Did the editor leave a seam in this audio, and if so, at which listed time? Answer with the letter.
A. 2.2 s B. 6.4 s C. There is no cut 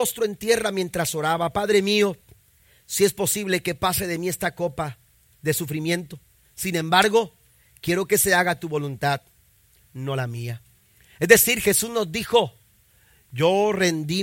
C